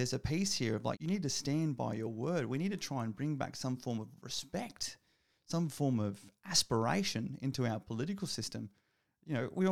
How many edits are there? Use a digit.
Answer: 1